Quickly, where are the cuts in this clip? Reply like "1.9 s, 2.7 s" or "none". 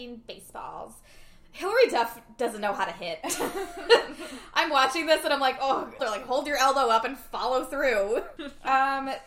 6.0 s, 8.4 s